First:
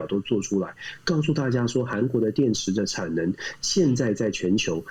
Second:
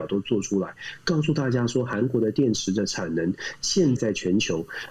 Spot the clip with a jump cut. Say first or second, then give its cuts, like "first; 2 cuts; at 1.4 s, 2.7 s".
second; 1 cut; at 4.0 s